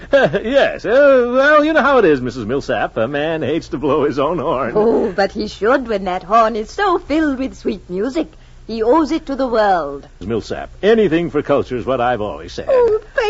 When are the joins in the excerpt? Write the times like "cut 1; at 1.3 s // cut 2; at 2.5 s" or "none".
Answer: cut 1; at 10.2 s